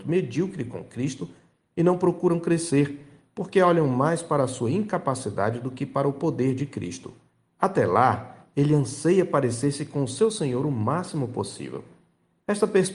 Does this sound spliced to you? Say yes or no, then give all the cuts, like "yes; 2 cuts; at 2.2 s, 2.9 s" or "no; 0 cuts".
yes; 1 cut; at 7.4 s